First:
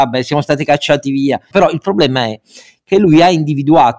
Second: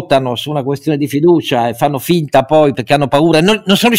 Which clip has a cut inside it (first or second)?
first